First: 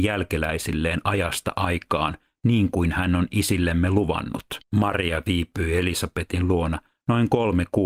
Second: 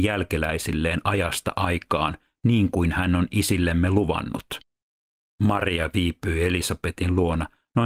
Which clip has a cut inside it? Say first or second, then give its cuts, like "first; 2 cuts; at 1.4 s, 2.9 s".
first; 1 cut; at 4.7 s